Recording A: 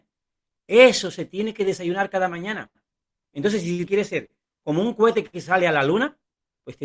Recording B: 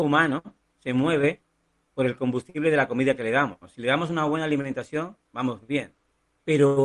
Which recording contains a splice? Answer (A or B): A